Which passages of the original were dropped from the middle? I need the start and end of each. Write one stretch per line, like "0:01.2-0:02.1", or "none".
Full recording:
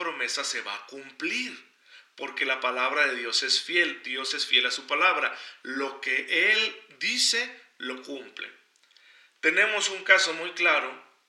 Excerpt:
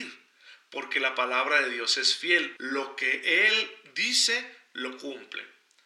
0:04.0-0:05.6